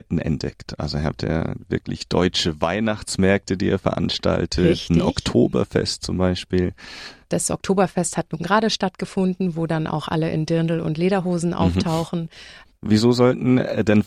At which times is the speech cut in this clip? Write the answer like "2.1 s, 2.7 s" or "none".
7.2 s, 12.7 s